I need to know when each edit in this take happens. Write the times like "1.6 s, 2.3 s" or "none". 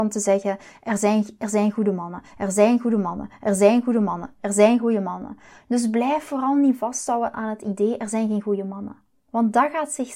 5.6 s